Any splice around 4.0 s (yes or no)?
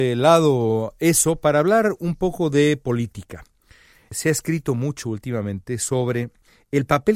no